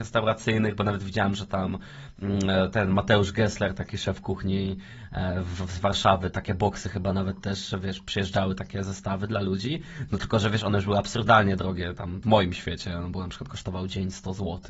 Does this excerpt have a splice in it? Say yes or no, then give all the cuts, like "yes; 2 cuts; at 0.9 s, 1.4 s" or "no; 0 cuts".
yes; 1 cut; at 12.2 s